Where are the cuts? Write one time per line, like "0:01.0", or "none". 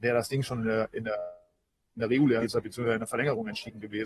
none